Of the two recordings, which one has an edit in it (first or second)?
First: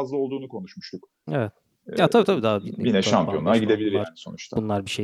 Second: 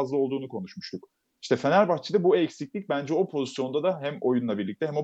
first